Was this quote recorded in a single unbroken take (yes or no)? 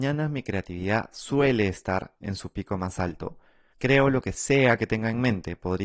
no